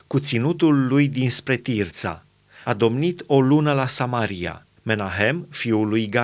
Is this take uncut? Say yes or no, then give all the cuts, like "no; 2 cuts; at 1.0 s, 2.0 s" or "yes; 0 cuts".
no; 2 cuts; at 2.6 s, 4.8 s